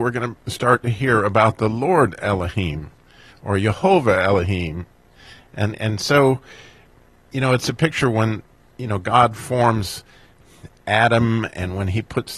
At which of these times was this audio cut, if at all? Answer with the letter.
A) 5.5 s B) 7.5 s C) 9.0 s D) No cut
D